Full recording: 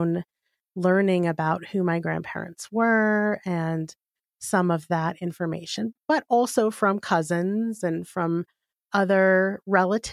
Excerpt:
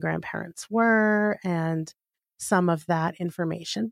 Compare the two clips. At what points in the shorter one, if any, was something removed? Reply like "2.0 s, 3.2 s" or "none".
none